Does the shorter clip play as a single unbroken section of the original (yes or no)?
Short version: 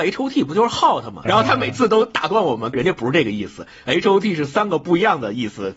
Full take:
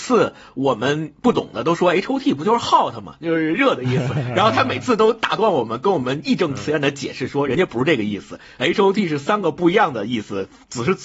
no